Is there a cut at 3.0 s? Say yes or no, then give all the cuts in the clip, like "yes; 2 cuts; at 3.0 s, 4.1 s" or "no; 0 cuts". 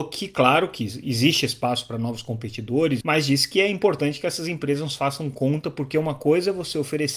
yes; 1 cut; at 3.0 s